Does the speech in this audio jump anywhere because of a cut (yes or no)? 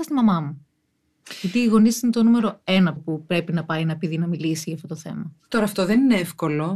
yes